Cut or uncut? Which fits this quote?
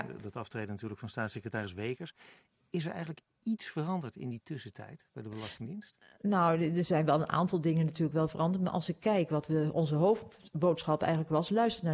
uncut